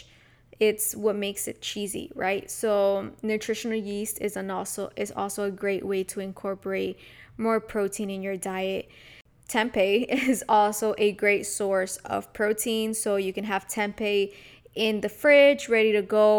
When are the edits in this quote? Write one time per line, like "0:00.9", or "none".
none